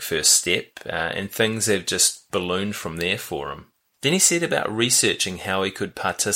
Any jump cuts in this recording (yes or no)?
yes